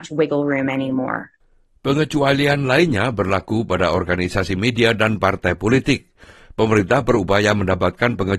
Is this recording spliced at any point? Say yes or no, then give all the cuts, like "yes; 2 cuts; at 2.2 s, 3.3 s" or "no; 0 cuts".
no; 0 cuts